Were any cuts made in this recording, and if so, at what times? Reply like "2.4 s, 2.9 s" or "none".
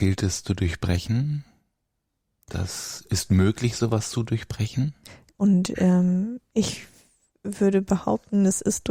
5.3 s